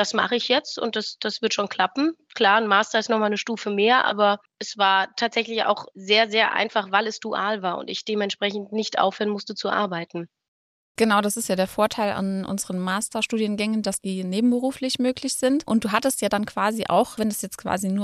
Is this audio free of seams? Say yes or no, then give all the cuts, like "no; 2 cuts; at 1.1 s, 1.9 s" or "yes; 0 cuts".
yes; 0 cuts